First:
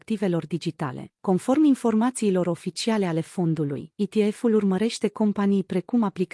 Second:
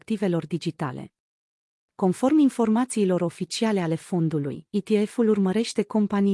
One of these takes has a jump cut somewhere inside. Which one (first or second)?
first